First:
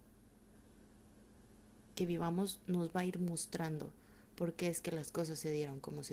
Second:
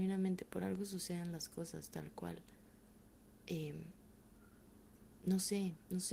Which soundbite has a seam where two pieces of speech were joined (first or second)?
first